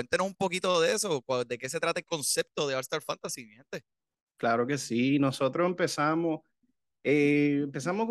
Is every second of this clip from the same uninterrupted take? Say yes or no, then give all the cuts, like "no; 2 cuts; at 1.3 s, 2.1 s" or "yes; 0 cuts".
yes; 0 cuts